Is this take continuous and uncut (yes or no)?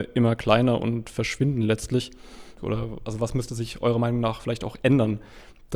no